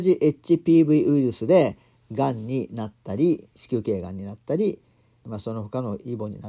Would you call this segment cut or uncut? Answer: cut